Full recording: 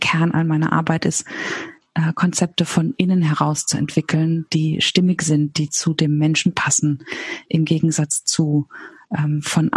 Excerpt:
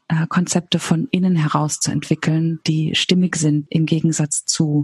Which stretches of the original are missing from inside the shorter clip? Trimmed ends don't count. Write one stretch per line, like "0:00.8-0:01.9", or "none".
0:05.5-0:07.5